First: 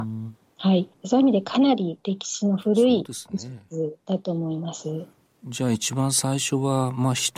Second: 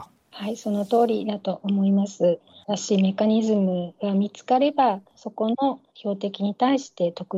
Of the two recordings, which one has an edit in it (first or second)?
second